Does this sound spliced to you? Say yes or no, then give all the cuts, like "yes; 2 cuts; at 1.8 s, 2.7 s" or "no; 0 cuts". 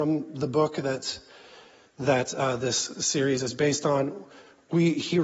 no; 0 cuts